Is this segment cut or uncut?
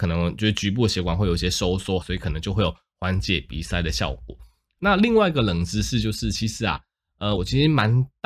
cut